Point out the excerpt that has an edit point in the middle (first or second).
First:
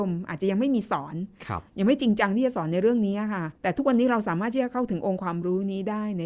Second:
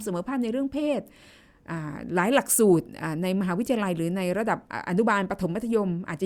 first